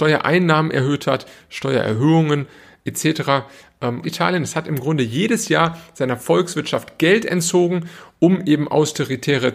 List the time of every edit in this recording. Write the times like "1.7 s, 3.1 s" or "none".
4.0 s